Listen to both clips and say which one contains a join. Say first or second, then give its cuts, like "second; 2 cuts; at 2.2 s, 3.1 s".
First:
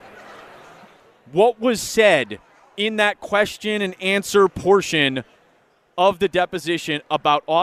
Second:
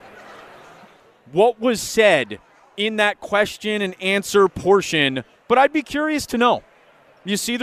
second; 1 cut; at 5.4 s